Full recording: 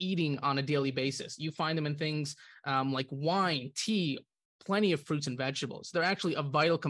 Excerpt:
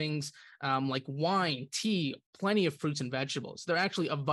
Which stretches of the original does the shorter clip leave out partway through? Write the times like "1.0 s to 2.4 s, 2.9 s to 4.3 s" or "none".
4.3 s to 4.5 s

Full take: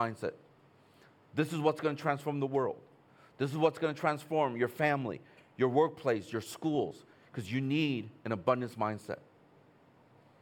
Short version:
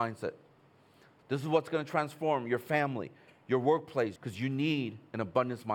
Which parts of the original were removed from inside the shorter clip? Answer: 1.2 s to 3.3 s, 6.3 s to 7.3 s

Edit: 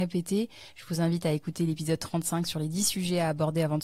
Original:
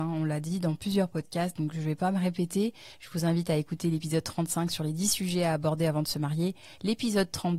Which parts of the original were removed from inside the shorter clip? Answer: none

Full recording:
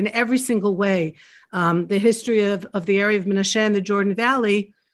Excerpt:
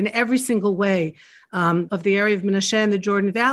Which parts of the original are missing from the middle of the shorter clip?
1.9 s to 2.7 s

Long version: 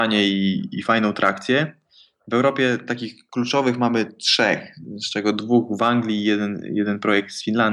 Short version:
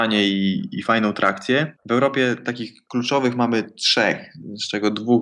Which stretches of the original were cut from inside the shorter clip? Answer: 1.8 s to 2.2 s

